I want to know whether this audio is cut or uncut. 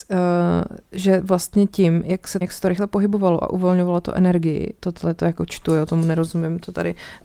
cut